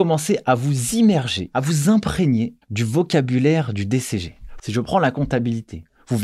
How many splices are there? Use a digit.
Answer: 2